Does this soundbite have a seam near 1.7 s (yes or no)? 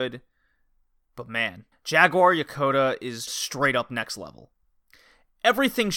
yes